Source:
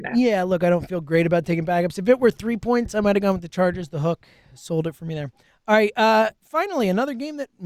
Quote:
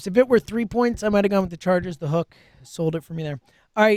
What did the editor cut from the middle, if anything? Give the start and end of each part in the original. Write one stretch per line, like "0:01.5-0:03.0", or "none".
none

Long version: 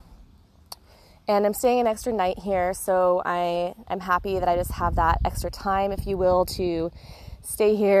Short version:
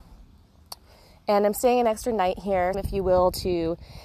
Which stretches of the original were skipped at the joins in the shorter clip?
0:02.7-0:05.9

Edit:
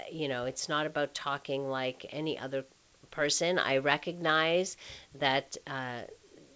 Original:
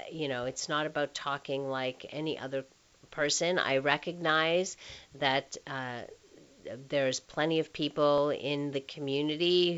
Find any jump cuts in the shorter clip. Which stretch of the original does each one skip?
none

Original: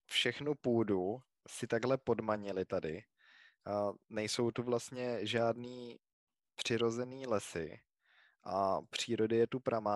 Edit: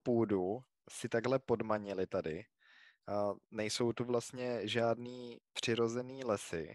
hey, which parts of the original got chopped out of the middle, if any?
0:06.0-0:06.5

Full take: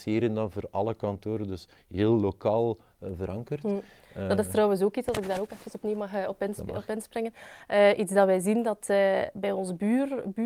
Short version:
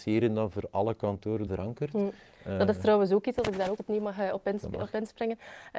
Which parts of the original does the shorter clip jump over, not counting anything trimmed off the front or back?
0:01.5-0:03.2
0:05.5-0:05.7

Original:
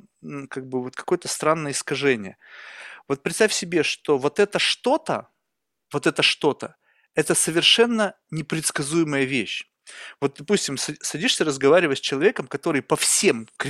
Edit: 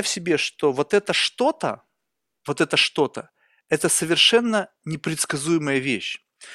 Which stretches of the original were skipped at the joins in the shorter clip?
none

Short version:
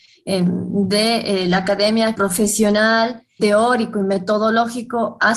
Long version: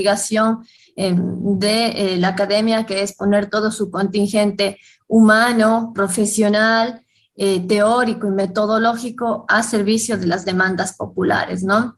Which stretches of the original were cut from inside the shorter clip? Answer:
0:02.9-0:05.9
0:07.2-0:07.7

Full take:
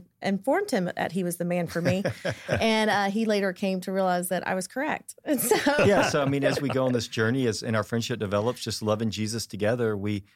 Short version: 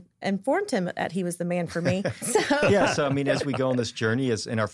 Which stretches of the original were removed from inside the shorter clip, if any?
0:02.2-0:05.4

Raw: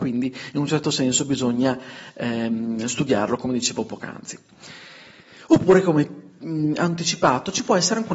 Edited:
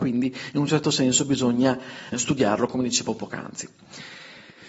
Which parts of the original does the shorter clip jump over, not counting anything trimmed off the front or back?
0:02.1-0:02.8

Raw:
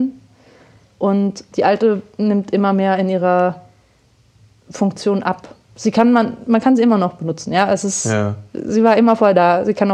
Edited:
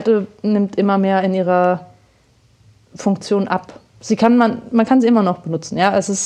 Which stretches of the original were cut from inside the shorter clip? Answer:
none

